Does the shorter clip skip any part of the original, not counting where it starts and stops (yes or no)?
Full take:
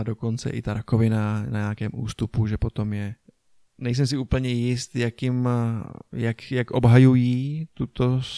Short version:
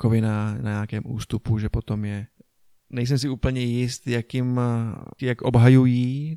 yes